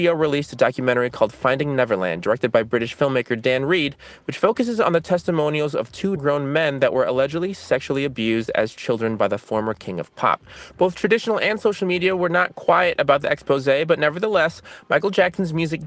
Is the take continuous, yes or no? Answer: no